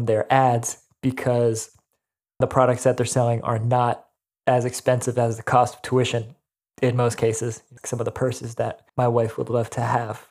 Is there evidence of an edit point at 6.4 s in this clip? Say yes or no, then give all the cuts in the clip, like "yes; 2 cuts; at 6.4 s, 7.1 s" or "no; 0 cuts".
no; 3 cuts; at 2.4 s, 7.8 s, 8.9 s